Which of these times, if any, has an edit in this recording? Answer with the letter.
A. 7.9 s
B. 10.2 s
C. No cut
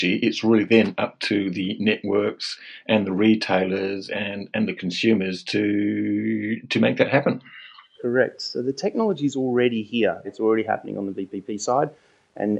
B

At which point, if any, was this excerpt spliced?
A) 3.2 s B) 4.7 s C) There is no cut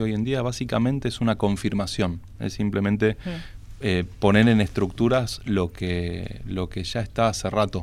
C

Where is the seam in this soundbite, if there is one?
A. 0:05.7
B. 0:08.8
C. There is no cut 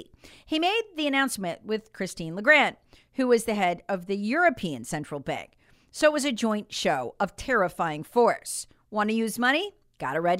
C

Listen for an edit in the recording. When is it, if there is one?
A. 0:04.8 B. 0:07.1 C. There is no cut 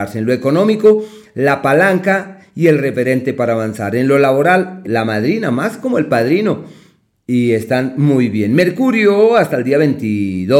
A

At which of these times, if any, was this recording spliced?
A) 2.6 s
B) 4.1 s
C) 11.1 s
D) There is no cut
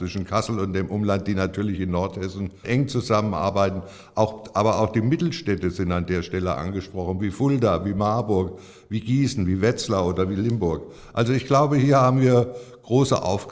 A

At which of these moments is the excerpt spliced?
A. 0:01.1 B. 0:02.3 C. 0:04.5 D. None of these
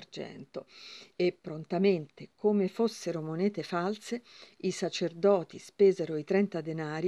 A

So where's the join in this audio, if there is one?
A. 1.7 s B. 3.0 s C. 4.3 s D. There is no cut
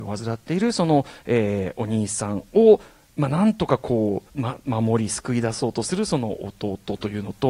C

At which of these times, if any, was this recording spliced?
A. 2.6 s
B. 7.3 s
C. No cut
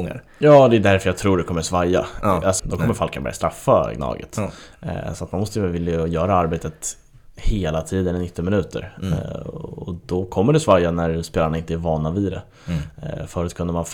A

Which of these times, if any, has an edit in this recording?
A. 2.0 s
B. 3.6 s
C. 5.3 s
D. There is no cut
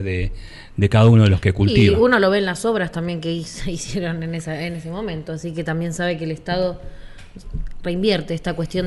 D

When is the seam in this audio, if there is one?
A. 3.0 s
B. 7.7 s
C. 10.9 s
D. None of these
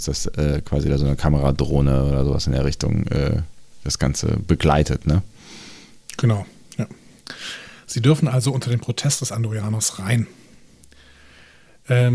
D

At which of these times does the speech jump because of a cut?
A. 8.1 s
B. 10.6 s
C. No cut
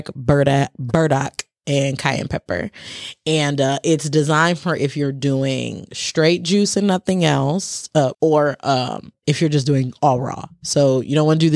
A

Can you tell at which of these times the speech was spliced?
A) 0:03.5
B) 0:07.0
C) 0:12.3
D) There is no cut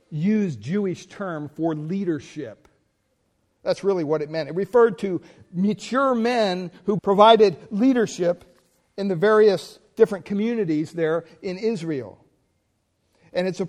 B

